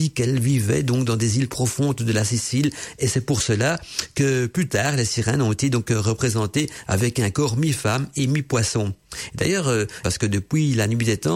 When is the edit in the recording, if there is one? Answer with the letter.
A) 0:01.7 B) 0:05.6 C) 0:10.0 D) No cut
C